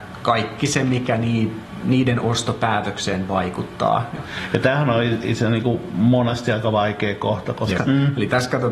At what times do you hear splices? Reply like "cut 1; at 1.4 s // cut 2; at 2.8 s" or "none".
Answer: cut 1; at 4.2 s // cut 2; at 7.8 s